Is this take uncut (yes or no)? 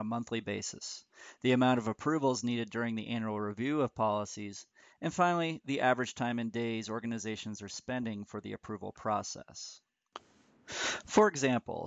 yes